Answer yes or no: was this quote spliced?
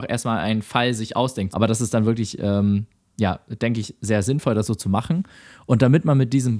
yes